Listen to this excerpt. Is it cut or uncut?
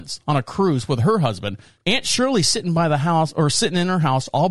uncut